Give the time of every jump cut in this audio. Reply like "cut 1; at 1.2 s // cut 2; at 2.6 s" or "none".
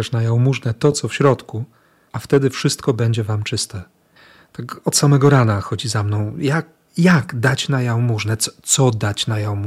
none